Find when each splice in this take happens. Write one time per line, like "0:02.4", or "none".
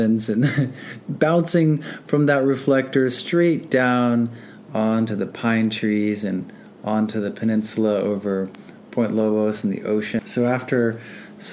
0:10.2